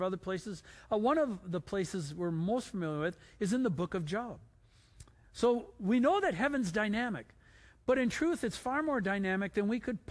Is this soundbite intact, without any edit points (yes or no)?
no